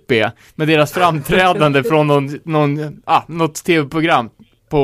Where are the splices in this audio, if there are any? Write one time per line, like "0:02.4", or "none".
none